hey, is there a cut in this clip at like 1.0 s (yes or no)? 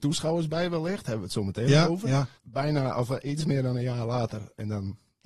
no